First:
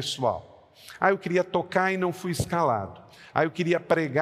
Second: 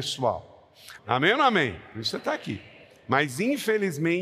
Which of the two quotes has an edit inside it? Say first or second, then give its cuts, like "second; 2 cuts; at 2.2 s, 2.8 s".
second; 1 cut; at 1.0 s